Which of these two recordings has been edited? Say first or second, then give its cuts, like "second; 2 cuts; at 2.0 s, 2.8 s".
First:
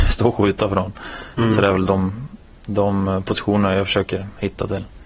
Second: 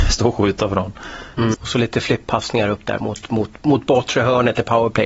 second; 1 cut; at 1.5 s